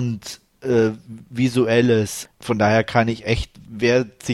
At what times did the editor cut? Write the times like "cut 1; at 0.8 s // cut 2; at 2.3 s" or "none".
cut 1; at 2.3 s